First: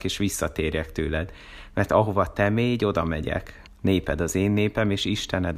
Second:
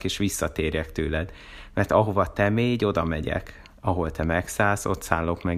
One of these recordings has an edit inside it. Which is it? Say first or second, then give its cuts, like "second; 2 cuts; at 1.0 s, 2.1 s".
first; 1 cut; at 3.7 s